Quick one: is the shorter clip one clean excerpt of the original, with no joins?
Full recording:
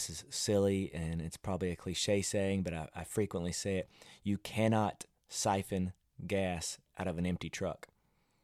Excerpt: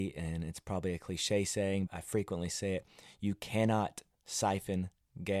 no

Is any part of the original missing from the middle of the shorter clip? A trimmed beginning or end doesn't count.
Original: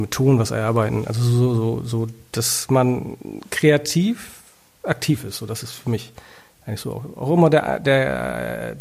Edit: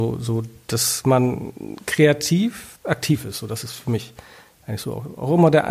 yes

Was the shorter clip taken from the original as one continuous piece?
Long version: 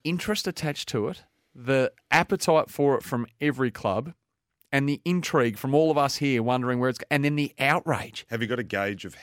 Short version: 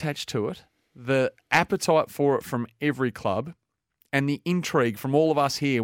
yes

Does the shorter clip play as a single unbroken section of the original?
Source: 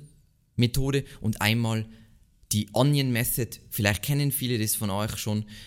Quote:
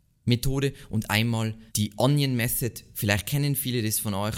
no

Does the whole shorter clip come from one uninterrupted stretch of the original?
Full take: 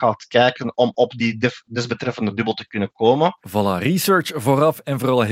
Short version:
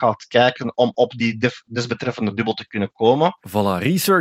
yes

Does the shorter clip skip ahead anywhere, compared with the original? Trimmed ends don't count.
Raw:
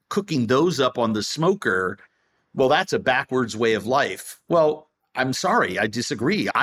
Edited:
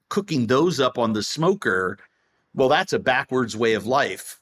no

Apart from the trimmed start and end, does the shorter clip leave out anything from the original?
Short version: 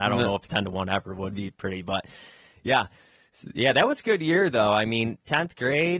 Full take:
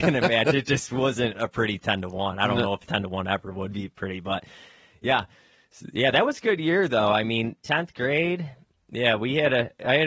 no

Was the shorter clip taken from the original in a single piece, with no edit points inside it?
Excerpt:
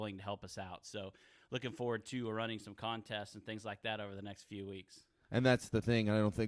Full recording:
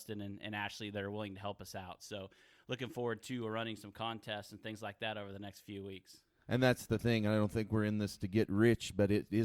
yes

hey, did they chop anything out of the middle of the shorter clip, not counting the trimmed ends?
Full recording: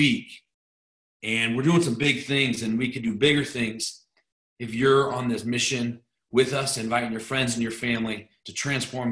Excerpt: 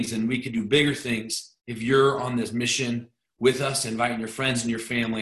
yes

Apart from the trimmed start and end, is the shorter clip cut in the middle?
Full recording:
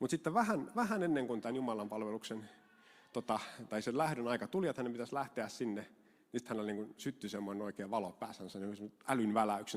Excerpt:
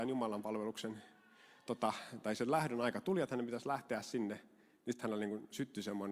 no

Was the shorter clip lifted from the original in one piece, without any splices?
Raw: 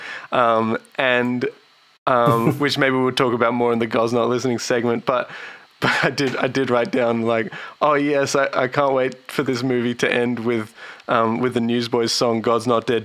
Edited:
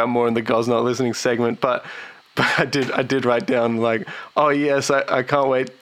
yes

